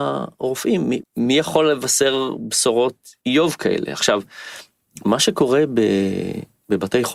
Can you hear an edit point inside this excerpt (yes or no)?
yes